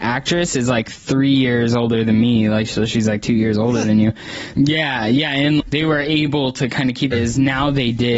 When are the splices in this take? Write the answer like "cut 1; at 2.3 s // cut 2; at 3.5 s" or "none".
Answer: cut 1; at 4.5 s // cut 2; at 5.6 s // cut 3; at 7.1 s